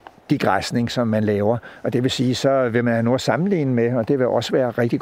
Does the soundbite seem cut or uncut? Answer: uncut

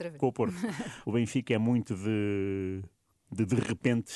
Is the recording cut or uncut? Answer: cut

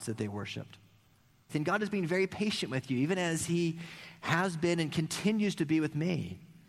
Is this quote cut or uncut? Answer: cut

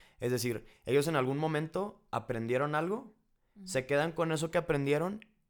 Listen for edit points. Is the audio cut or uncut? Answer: uncut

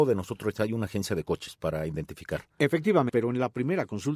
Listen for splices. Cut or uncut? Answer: cut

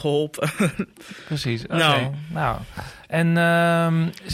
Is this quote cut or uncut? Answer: uncut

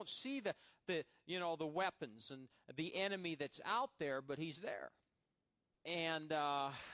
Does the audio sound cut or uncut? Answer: cut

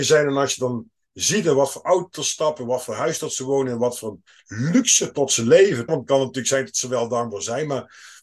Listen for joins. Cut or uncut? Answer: cut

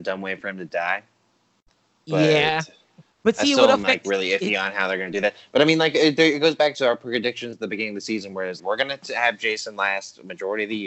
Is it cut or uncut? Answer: cut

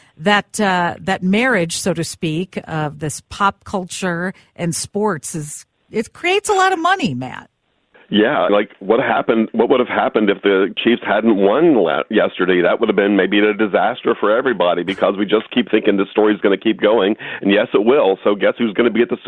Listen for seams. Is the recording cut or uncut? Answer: cut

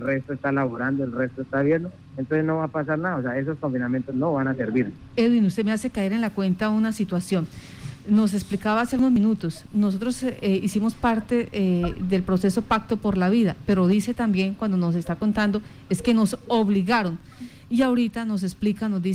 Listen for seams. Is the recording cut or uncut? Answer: uncut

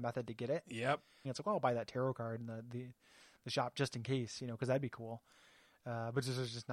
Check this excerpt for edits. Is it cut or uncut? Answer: cut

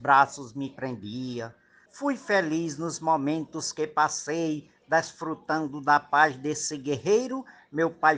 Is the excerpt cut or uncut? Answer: cut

